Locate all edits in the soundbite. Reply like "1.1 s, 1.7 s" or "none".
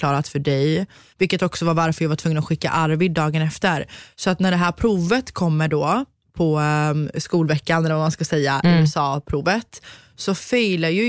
1.1 s